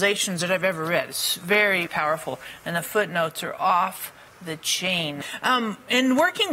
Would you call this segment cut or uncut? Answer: cut